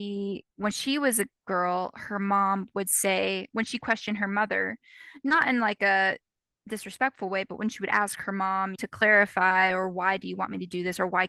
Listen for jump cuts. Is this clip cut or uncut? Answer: cut